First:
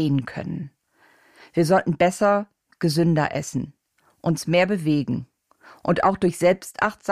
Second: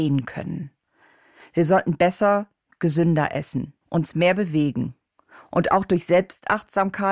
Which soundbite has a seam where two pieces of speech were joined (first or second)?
second